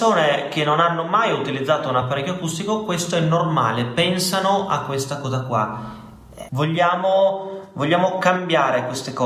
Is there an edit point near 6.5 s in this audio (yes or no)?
yes